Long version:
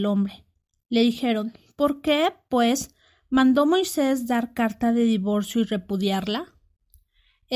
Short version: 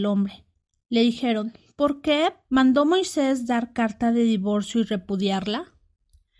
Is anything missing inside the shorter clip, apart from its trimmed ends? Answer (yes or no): yes